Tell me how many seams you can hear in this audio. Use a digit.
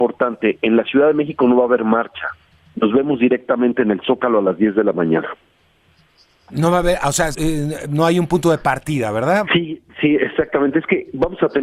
2